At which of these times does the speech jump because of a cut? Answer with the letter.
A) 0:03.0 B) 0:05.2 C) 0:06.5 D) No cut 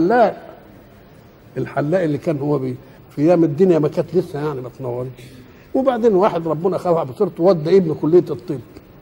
A